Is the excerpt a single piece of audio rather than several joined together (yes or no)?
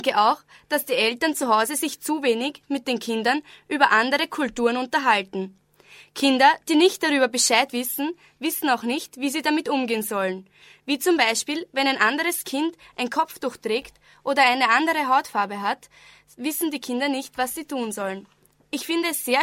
yes